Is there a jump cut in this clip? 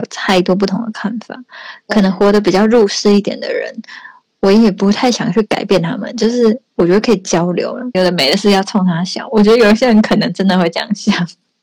yes; 1 cut; at 7.9 s

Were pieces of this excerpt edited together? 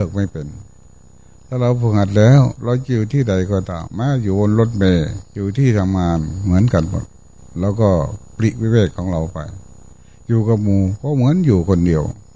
yes; 2 cuts; at 3.9 s, 5.2 s

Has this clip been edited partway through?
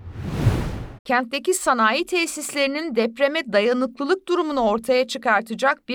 yes; 1 cut; at 1.0 s

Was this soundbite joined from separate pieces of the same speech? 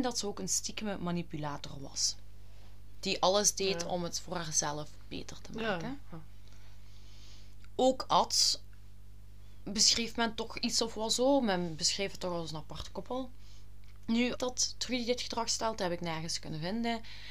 yes; 1 cut; at 14.3 s

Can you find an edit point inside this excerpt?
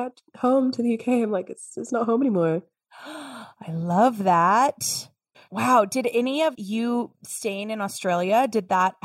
yes; 2 cuts; at 5.3 s, 6.5 s

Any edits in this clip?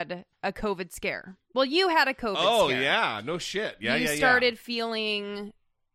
no; 0 cuts

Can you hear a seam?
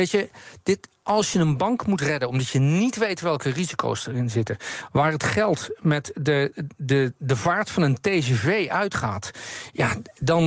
yes; 1 cut; at 6.5 s

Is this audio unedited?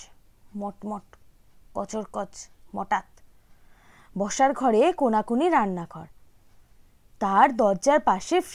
yes; 0 cuts

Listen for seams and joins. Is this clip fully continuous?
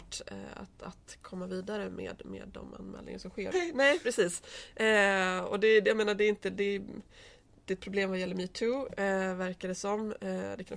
no; 1 cut; at 3.5 s

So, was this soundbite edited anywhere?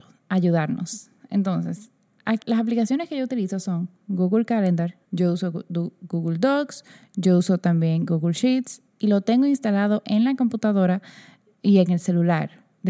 yes; 2 cuts; at 2.4 s, 5.1 s

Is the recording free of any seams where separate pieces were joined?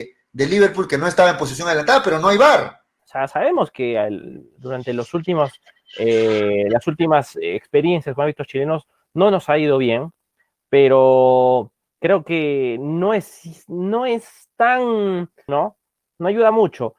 no; 2 cuts; at 3.0 s, 15.5 s

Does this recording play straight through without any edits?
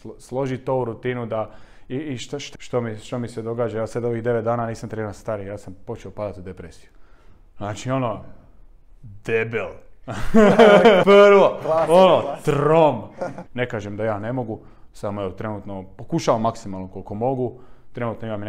no; 3 cuts; at 2.6 s, 11.0 s, 13.5 s

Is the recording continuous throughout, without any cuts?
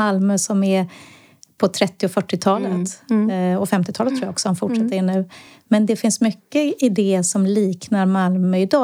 yes; 0 cuts

